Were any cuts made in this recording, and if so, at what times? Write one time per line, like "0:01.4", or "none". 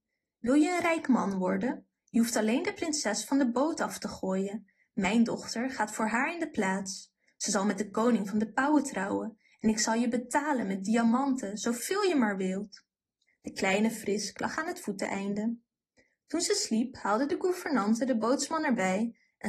0:13.3

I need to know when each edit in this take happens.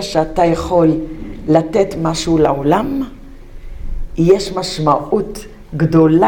none

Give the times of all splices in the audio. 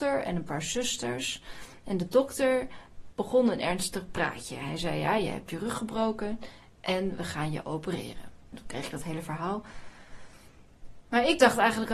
0:08.5

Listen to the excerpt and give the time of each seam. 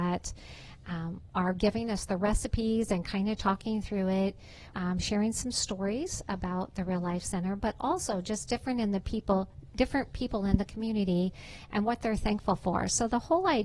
0:04.7

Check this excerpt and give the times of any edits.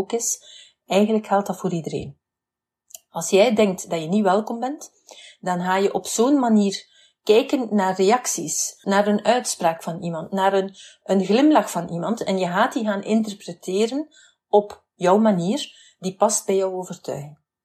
0:08.8

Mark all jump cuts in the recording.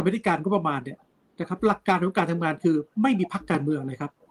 none

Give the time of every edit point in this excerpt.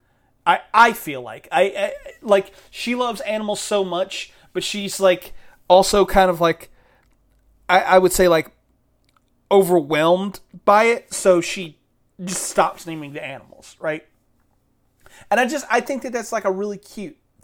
none

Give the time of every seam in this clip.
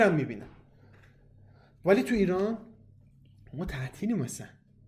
none

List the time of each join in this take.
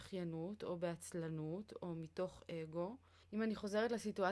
0:03.2

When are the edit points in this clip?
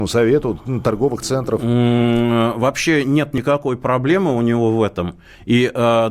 none

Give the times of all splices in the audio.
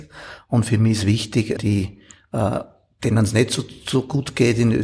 0:01.6

